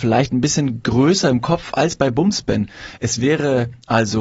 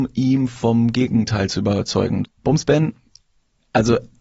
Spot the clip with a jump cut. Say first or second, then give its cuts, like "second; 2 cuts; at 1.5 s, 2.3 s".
second; 1 cut; at 2.2 s